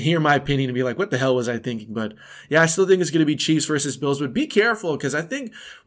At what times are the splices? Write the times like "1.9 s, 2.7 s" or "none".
none